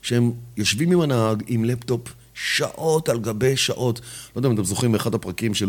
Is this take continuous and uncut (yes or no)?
yes